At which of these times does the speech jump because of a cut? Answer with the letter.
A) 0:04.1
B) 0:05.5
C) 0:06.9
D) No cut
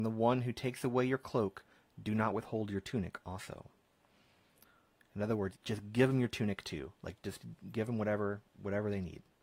B